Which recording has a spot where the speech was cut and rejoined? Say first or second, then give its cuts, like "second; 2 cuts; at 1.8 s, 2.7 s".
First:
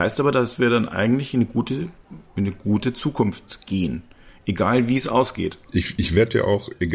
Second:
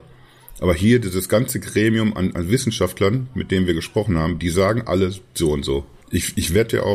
second; 1 cut; at 6.0 s